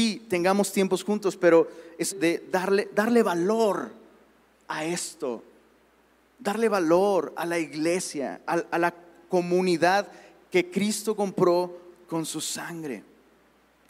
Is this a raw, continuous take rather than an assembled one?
no; 1 cut; at 2.1 s

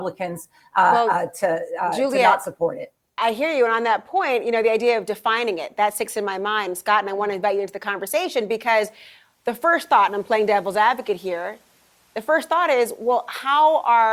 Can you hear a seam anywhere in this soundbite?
no; 0 cuts

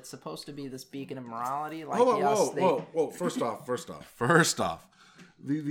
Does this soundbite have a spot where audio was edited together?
no; 0 cuts

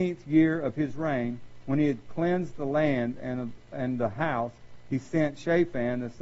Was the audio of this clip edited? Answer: no; 0 cuts

